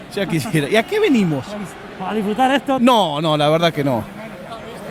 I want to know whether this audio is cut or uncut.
cut